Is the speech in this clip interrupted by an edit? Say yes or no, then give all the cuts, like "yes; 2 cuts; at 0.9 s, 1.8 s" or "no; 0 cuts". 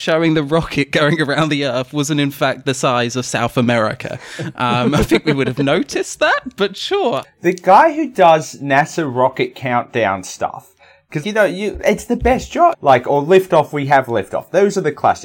yes; 3 cuts; at 7.2 s, 11.2 s, 12.7 s